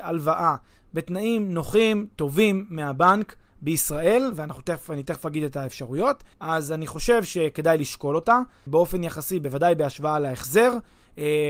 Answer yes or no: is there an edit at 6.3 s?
yes